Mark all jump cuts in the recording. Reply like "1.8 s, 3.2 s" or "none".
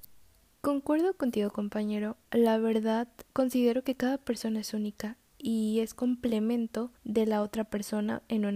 3.3 s, 7.0 s